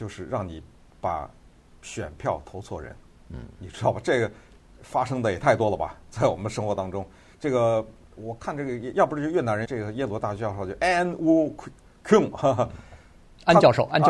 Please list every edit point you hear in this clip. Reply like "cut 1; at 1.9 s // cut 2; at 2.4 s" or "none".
cut 1; at 7.3 s // cut 2; at 9.6 s